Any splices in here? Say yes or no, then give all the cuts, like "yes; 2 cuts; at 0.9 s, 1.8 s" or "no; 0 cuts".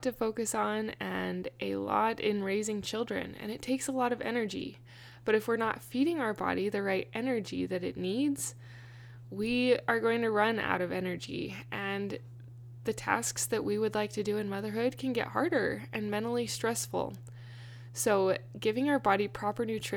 no; 0 cuts